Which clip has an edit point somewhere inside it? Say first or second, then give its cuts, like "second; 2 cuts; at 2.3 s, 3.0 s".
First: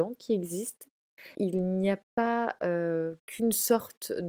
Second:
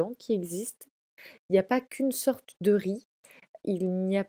first; 1 cut; at 1.3 s